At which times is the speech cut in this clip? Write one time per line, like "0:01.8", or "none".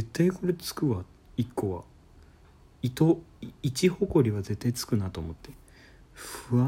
none